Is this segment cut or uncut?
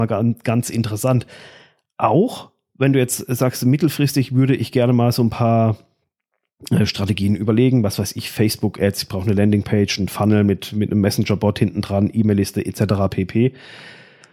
uncut